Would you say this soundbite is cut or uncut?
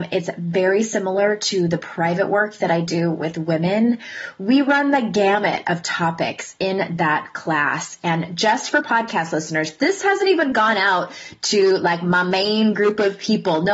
uncut